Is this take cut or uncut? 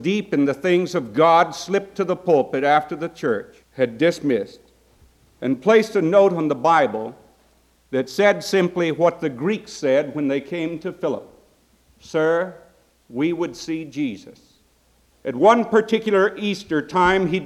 cut